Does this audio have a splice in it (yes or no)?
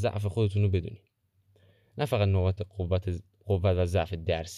no